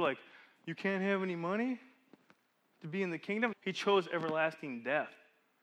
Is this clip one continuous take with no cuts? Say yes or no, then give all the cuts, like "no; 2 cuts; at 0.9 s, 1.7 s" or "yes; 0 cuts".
no; 1 cut; at 3.5 s